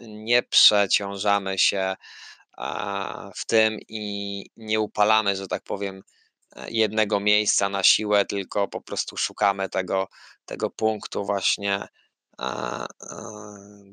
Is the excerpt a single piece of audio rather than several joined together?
yes; 0 cuts

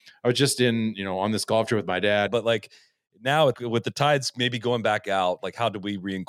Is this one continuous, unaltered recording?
no; 2 cuts; at 2.3 s, 3.5 s

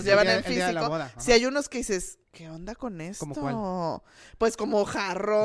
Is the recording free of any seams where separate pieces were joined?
no; 1 cut; at 2.2 s

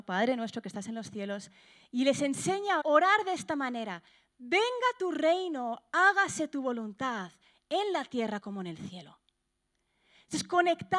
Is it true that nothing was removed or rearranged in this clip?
no; 1 cut; at 2.8 s

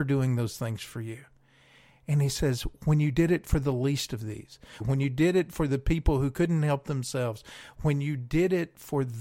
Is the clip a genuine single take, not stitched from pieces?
no; 1 cut; at 4.8 s

